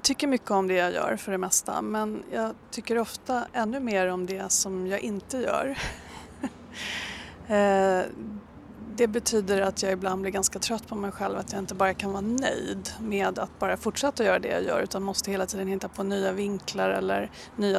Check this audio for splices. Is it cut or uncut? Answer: uncut